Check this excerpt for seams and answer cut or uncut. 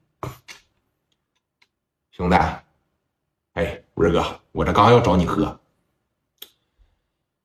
uncut